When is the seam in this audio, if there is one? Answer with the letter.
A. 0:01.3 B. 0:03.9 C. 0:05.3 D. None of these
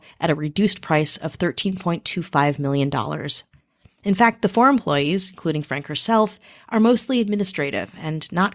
D